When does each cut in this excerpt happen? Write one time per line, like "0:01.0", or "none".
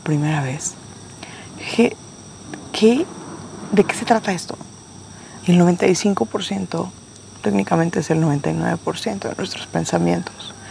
0:05.4
0:07.4

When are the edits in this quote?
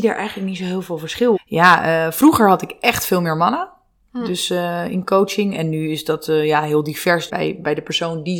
0:01.3
0:07.3

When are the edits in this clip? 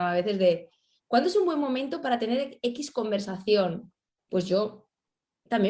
none

